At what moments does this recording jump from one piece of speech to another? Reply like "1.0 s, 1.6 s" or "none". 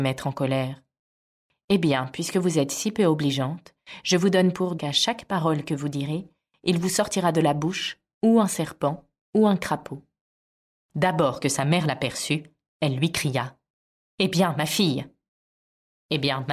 4.8 s